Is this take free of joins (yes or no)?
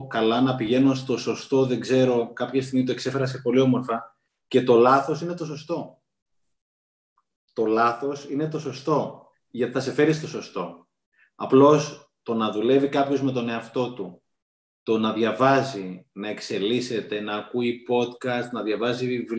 yes